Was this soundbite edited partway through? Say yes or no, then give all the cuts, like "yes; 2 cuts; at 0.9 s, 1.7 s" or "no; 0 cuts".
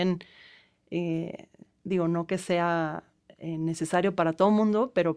no; 0 cuts